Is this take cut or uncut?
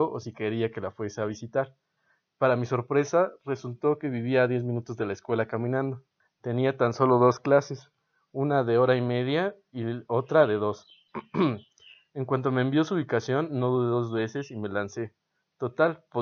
cut